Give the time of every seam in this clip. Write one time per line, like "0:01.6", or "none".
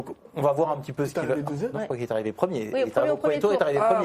0:01.7